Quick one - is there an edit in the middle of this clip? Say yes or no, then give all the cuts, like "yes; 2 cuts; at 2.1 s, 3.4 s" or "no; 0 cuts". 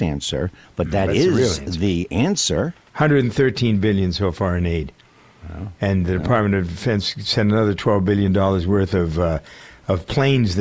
no; 0 cuts